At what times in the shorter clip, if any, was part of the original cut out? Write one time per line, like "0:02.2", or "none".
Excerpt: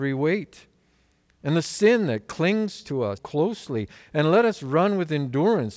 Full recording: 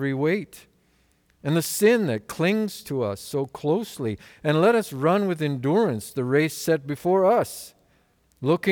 0:03.2